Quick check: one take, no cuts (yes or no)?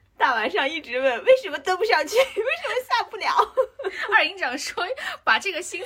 yes